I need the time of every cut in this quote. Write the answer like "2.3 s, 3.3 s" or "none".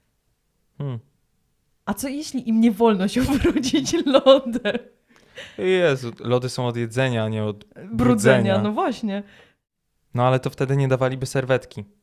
none